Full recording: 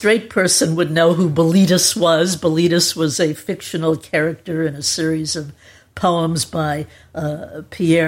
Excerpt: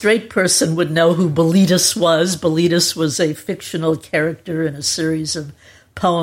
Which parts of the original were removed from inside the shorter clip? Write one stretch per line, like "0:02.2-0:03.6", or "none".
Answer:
none